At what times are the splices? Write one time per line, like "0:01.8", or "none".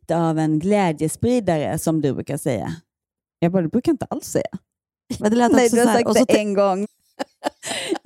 0:05.2
0:06.8